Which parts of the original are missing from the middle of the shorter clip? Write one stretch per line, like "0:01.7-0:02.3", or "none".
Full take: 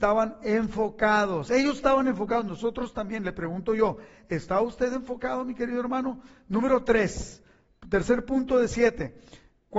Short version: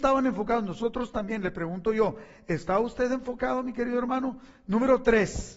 none